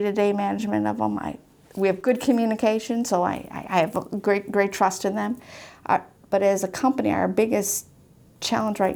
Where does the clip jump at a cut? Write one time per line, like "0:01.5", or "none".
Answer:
none